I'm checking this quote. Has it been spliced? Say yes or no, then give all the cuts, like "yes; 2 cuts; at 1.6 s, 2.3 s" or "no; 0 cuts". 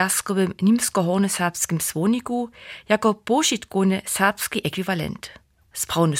no; 0 cuts